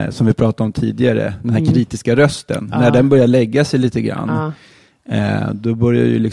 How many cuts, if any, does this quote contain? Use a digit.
0